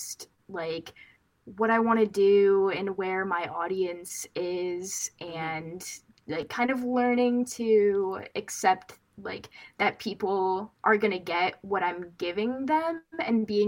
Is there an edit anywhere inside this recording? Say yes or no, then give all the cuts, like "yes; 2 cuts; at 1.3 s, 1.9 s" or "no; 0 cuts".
no; 0 cuts